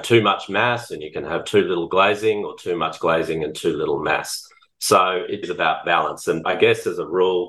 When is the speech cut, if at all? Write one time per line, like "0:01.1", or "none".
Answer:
0:05.4
0:06.4